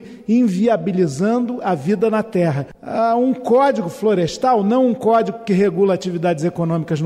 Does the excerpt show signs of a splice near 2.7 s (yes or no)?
yes